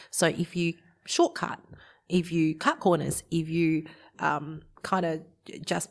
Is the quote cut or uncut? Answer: cut